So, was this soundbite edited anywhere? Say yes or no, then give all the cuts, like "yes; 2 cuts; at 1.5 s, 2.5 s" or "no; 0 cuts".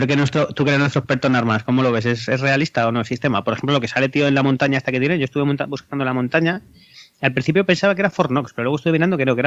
no; 0 cuts